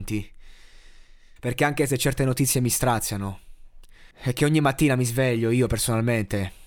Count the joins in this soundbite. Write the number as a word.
two